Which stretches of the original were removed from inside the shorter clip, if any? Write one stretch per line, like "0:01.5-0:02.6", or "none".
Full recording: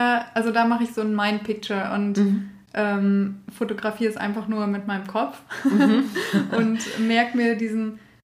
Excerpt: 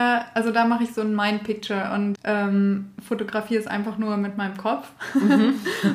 0:02.1-0:02.6